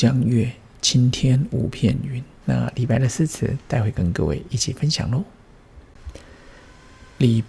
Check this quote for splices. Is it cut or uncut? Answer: cut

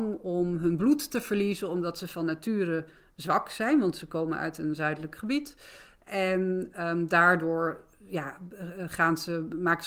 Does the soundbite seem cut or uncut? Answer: uncut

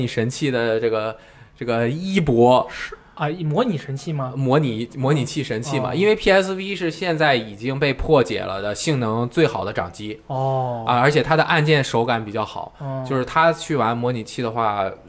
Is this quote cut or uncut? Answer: uncut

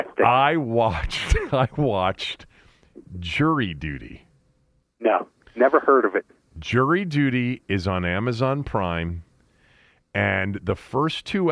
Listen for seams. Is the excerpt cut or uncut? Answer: cut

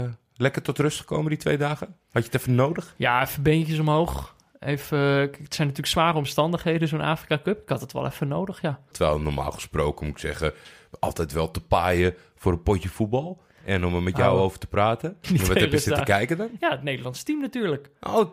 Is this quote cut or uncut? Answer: cut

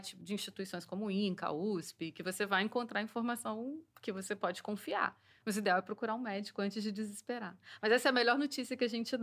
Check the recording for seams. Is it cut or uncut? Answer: uncut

